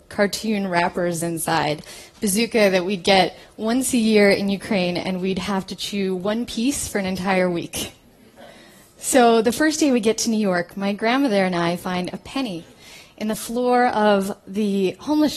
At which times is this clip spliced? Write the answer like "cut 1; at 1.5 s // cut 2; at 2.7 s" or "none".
none